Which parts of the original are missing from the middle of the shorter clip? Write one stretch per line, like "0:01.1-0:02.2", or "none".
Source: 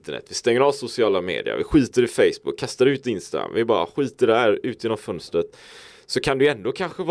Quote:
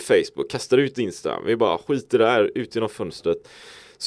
none